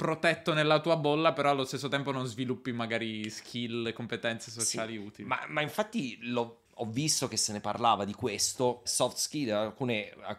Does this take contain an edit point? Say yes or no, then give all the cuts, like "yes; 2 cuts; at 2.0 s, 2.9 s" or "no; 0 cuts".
yes; 1 cut; at 8.9 s